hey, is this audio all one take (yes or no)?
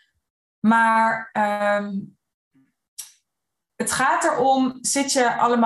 yes